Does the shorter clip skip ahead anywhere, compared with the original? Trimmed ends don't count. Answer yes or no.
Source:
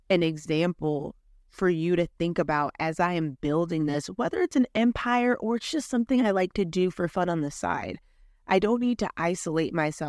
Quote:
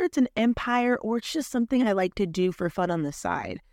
no